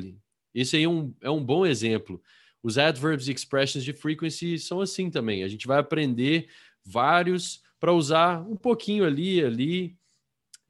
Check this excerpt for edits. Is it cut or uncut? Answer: uncut